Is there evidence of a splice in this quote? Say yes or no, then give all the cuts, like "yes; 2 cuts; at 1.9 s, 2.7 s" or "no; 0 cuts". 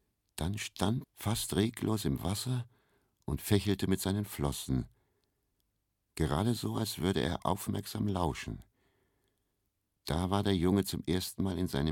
yes; 1 cut; at 1.0 s